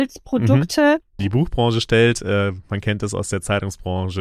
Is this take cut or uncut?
cut